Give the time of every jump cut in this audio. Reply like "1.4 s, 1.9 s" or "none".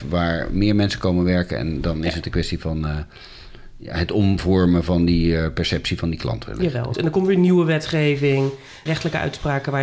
6.9 s, 8.9 s